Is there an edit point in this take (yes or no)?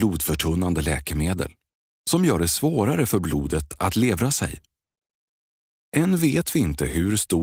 yes